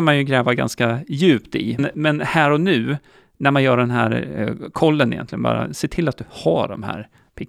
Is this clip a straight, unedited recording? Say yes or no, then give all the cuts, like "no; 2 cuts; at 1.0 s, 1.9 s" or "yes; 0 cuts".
no; 1 cut; at 1.8 s